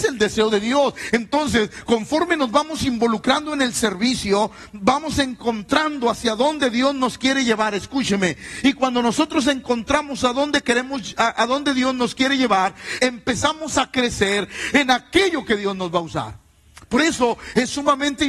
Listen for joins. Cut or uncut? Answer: cut